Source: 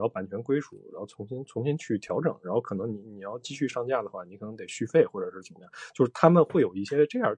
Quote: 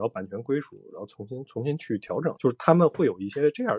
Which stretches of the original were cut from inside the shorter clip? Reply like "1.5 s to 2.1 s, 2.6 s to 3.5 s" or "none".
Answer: 2.4 s to 5.9 s